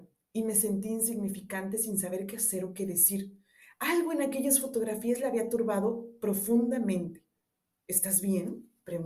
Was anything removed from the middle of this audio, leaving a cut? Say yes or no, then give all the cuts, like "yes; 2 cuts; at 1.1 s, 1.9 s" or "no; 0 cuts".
no; 0 cuts